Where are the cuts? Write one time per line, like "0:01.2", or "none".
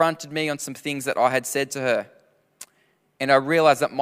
none